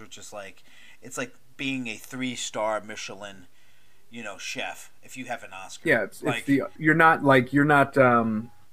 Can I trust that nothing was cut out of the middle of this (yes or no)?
no